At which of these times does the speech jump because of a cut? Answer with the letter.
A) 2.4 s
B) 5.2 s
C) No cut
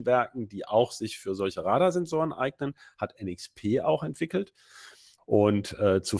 B